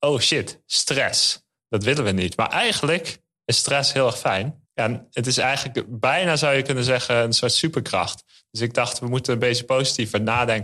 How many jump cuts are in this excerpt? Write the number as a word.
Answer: one